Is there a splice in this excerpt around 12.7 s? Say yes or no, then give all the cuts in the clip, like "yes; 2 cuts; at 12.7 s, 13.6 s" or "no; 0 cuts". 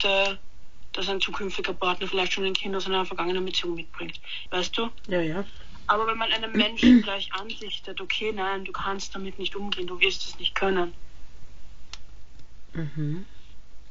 yes; 2 cuts; at 4.5 s, 12.7 s